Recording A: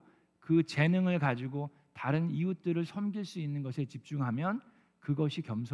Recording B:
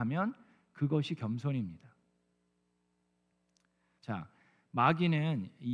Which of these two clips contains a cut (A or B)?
B